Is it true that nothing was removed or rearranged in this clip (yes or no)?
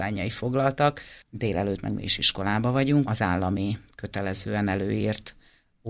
no